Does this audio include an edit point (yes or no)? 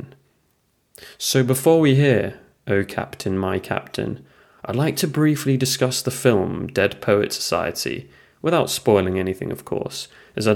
no